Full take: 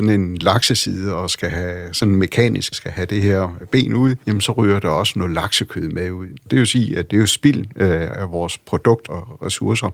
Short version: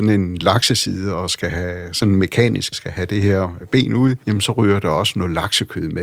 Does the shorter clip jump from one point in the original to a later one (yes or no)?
no